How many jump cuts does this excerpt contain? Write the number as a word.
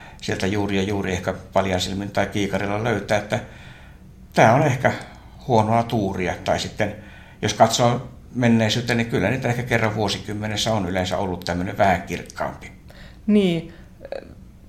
zero